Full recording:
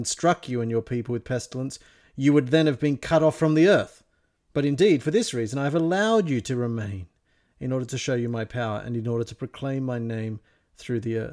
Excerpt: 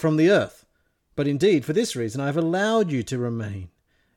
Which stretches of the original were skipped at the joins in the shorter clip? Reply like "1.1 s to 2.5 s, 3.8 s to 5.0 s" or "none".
none